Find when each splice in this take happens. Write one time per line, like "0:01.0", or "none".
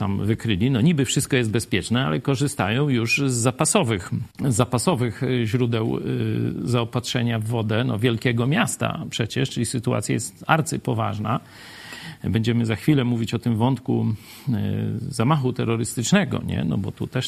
0:04.3